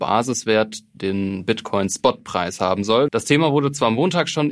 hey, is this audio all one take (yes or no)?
no